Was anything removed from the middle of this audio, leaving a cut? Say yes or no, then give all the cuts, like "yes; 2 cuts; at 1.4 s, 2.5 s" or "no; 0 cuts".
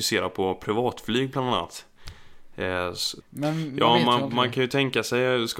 yes; 1 cut; at 3.2 s